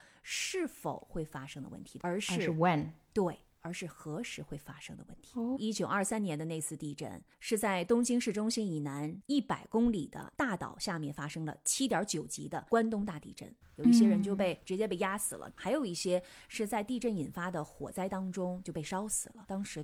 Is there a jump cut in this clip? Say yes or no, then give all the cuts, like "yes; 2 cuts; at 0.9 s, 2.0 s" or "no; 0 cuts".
yes; 2 cuts; at 5.6 s, 13.6 s